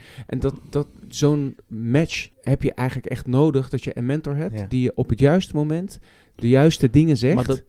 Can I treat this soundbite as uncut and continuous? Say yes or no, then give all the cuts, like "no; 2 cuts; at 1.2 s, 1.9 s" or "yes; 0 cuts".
no; 1 cut; at 2.3 s